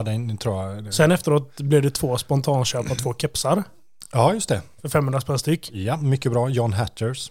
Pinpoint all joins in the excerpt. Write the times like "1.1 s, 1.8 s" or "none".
none